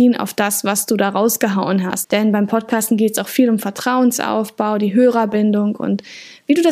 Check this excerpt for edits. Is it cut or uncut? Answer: cut